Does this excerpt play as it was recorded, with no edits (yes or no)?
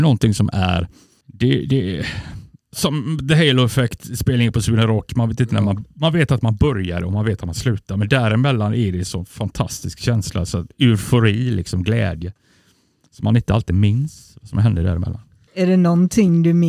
yes